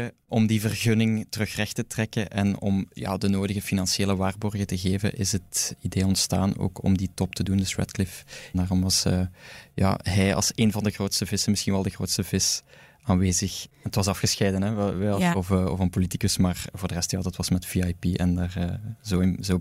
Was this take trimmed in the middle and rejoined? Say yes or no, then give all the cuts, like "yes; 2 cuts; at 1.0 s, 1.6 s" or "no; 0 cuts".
yes; 1 cut; at 15.3 s